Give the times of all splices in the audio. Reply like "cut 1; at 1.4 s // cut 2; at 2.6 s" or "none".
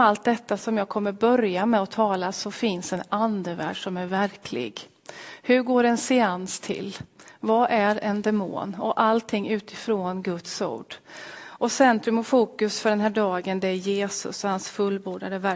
cut 1; at 11.4 s